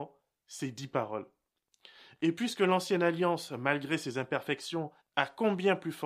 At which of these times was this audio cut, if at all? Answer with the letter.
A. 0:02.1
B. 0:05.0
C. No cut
B